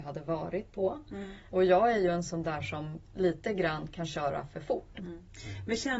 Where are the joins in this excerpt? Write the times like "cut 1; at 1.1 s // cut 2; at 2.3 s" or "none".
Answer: cut 1; at 1.5 s // cut 2; at 4.9 s